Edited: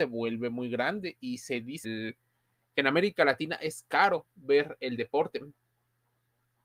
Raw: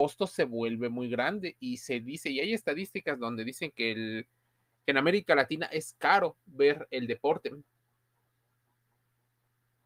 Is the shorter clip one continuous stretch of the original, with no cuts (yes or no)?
no